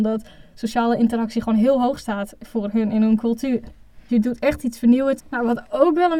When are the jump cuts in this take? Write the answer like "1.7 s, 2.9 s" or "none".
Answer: 4.1 s, 5.2 s